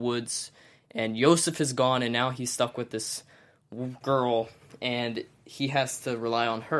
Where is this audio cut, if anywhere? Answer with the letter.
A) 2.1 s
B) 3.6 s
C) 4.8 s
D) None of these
D